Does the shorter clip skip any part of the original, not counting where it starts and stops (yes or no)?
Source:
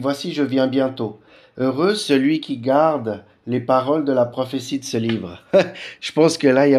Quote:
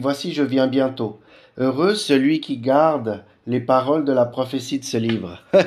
no